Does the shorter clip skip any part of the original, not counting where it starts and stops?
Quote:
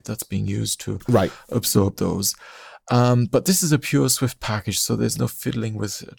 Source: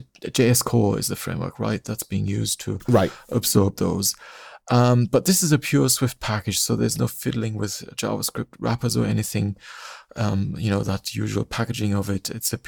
no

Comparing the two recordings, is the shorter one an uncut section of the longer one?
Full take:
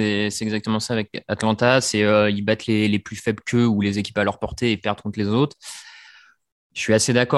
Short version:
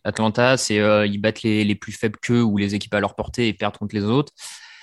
yes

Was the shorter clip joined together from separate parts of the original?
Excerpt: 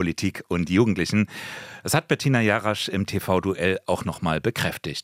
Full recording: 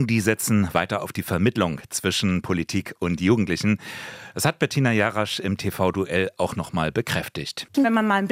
no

